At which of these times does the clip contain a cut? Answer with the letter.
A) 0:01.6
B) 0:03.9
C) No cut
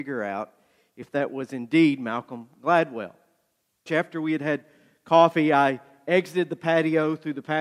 B